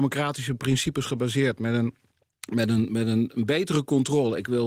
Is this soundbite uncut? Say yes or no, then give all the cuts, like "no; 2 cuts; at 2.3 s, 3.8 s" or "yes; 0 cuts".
yes; 0 cuts